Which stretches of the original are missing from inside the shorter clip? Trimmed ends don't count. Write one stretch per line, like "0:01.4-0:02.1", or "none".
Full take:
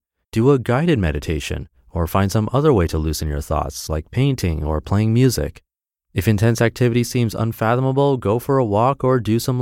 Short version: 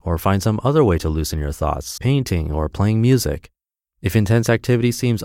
0:03.9-0:04.1